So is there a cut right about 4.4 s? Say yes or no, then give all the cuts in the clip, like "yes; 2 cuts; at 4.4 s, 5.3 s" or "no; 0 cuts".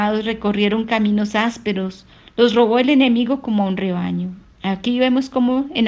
yes; 1 cut; at 4.4 s